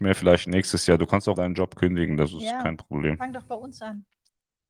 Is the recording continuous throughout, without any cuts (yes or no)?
no